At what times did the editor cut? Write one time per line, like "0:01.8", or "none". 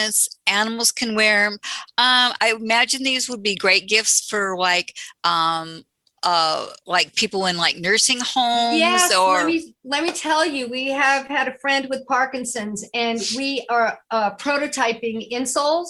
none